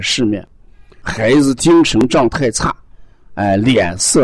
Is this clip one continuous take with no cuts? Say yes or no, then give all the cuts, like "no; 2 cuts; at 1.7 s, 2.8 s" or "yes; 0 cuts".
no; 1 cut; at 1.0 s